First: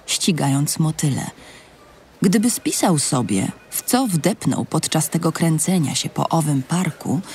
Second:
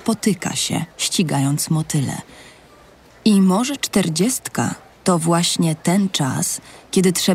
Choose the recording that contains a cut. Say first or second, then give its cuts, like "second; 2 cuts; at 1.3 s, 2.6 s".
second; 1 cut; at 3.1 s